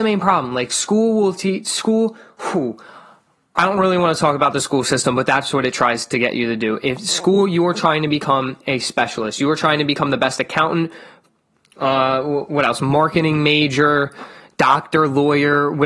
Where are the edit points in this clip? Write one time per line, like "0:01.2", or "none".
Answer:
0:11.6